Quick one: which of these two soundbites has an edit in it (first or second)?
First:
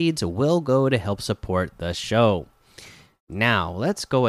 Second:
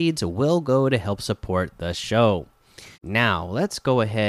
second